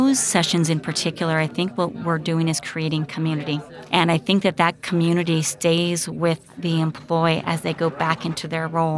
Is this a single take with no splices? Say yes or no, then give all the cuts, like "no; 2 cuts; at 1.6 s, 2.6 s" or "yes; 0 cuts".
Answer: yes; 0 cuts